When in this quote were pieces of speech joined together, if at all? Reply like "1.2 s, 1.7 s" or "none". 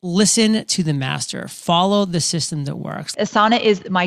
3.1 s